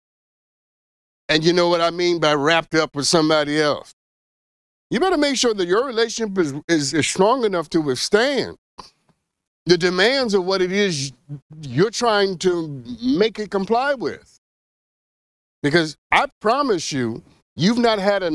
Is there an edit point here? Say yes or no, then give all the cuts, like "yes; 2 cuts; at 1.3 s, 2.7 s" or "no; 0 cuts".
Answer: no; 0 cuts